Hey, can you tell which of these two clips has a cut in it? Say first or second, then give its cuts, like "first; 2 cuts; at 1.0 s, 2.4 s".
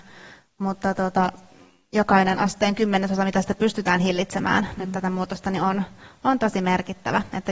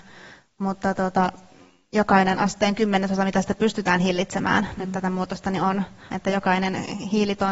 second; 1 cut; at 6.1 s